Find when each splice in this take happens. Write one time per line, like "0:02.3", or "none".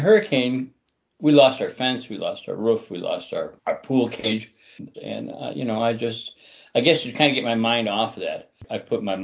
0:04.9